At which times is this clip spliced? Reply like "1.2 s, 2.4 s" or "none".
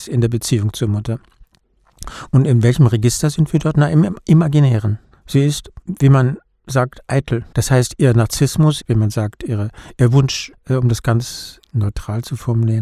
7.5 s, 8.8 s, 10.5 s